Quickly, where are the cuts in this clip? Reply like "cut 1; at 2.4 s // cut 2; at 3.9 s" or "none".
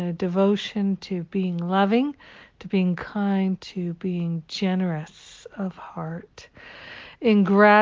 cut 1; at 3.6 s